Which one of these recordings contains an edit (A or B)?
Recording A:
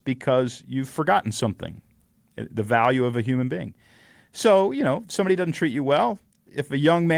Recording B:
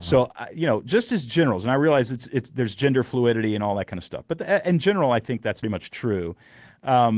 B